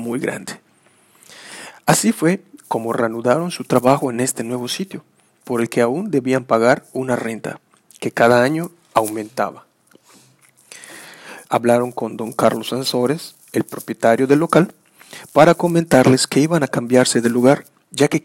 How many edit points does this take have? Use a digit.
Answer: 1